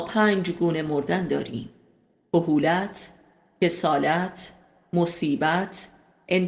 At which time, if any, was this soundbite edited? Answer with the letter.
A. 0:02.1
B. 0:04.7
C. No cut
C